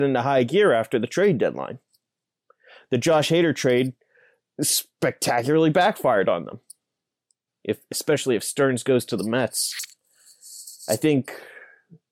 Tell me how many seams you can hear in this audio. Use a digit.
1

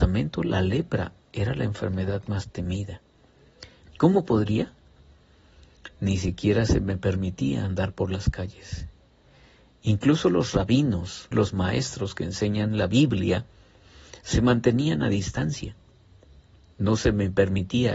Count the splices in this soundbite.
2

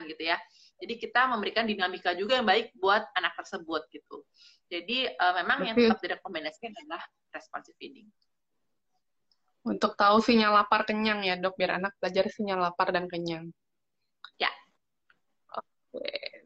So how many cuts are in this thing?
1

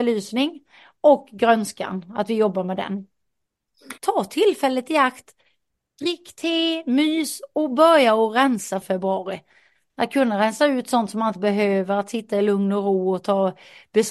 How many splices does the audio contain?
2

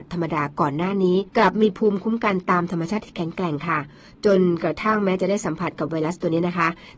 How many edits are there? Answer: 1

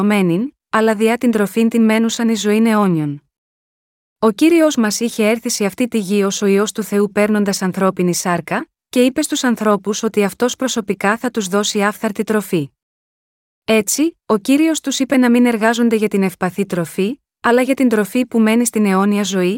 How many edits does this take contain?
0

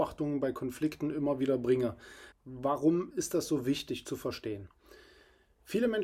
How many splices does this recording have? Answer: 1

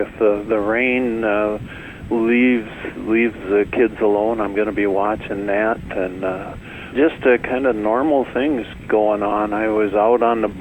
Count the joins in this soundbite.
1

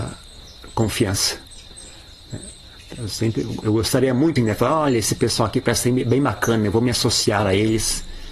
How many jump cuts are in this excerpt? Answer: 1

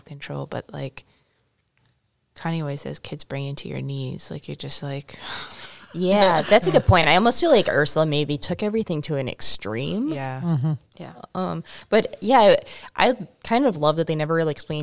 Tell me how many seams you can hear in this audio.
0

